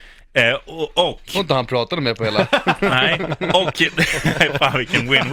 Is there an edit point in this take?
no; 0 cuts

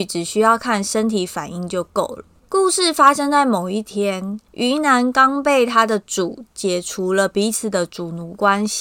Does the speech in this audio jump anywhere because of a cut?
yes; 2 cuts; at 2.4 s, 4.5 s

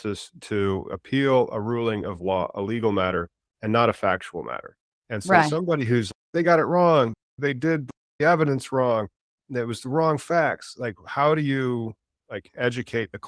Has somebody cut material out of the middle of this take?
no; 0 cuts

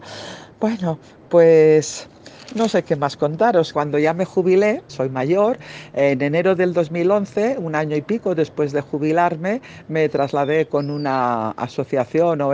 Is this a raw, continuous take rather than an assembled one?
no; 2 cuts; at 3.7 s, 4.9 s

